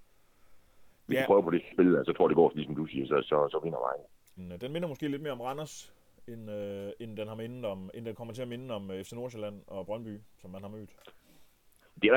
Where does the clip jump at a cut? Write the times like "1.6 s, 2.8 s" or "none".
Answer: 4.4 s